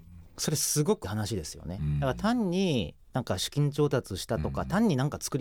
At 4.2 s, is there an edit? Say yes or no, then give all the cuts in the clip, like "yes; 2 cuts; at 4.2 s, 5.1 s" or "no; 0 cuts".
no; 1 cut; at 1.0 s